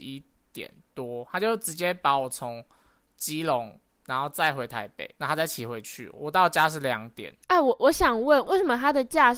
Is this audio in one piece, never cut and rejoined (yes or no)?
yes